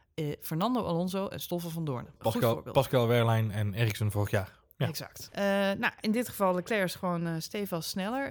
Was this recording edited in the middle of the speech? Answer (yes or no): yes